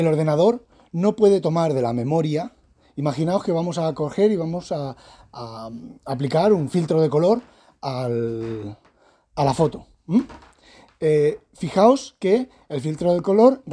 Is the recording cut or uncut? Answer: uncut